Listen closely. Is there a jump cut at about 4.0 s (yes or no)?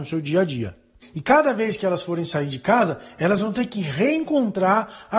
no